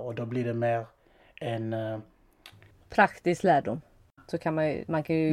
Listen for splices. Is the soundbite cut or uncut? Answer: cut